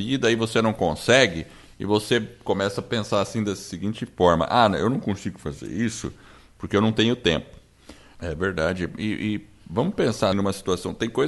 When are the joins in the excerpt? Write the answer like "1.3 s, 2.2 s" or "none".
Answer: 8.1 s, 10.3 s

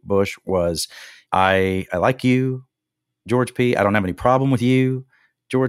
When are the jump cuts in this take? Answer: 1.3 s

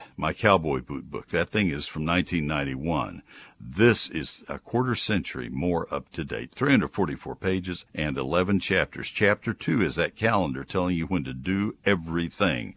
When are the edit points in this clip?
4.4 s, 7.9 s

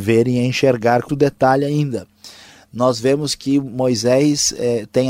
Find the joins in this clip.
1.1 s

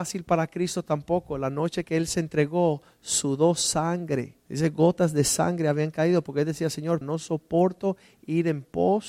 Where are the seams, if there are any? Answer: 4.4 s, 7.0 s

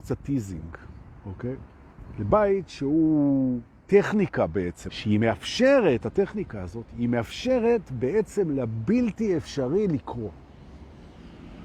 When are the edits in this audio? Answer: 4.9 s

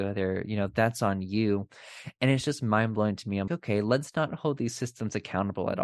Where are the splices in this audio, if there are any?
3.5 s

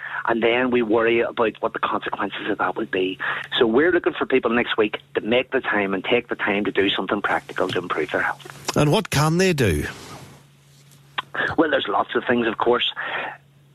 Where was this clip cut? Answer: none

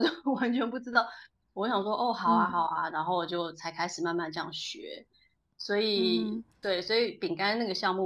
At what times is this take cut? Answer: 1.4 s

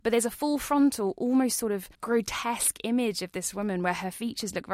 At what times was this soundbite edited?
1.9 s

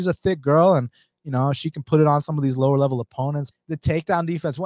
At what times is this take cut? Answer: 3.5 s

